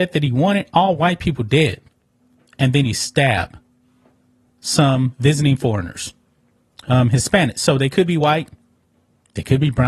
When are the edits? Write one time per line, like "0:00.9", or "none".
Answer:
none